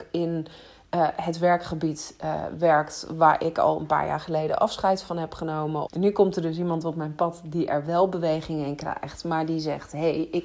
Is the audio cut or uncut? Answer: cut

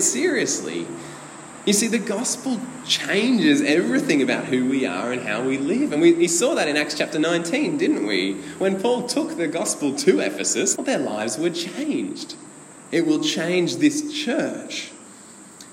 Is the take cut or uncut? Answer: cut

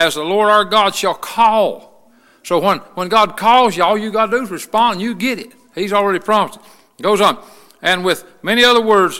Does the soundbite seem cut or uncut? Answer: uncut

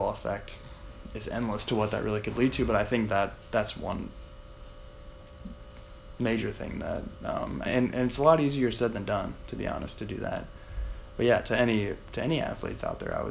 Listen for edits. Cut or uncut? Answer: cut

